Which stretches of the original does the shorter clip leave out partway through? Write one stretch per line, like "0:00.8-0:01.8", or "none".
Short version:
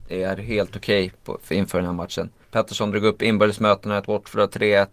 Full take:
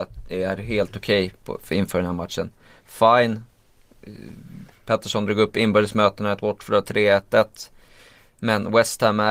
0:02.6-0:04.8